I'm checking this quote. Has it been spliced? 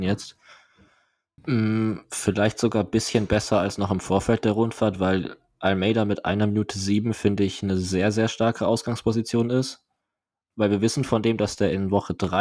yes; 1 cut; at 1.4 s

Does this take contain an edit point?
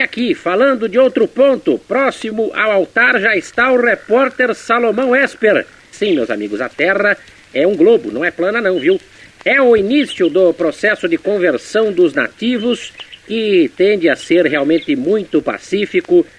yes; 1 cut; at 5.9 s

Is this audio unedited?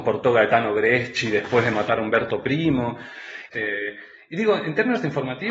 no; 1 cut; at 3.5 s

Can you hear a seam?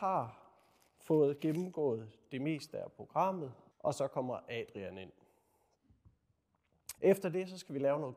yes; 2 cuts; at 3.7 s, 7.0 s

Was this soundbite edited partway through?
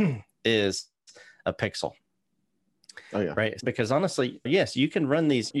no; 0 cuts

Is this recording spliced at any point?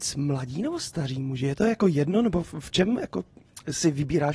no; 0 cuts

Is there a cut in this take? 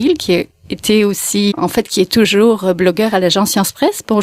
yes; 1 cut; at 1.5 s

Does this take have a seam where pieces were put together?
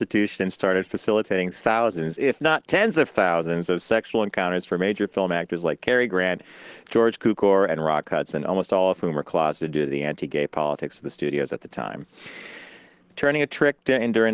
no; 0 cuts

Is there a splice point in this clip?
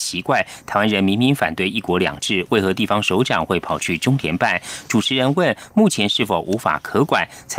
no; 0 cuts

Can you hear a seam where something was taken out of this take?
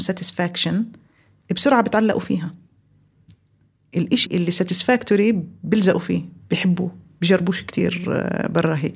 yes; 1 cut; at 4.2 s

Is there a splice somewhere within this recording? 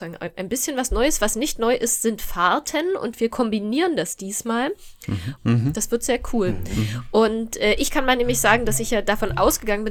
yes; 1 cut; at 5.4 s

